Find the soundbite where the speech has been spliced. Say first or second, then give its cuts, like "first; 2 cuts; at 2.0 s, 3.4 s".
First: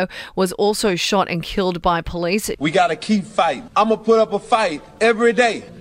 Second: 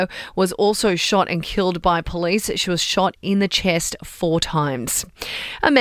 first; 2 cuts; at 2.5 s, 3.7 s